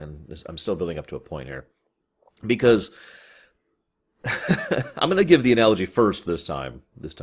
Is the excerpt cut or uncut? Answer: uncut